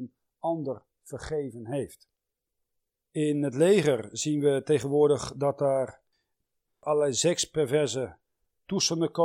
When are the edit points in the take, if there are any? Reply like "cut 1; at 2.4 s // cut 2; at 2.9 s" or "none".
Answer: cut 1; at 3.0 s